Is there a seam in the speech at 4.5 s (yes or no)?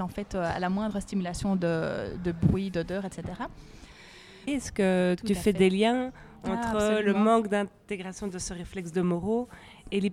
yes